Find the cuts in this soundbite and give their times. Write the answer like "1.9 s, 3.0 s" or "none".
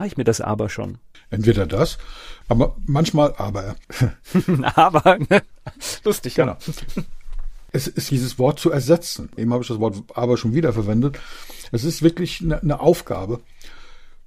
8.1 s, 9.4 s